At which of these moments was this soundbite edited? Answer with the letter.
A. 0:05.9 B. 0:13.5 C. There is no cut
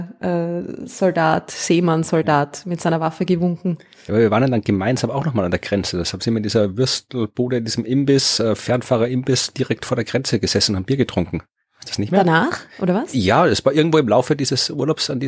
C